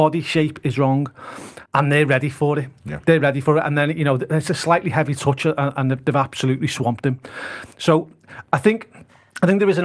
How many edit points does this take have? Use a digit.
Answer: 1